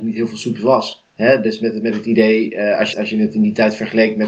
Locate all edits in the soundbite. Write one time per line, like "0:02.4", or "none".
0:02.9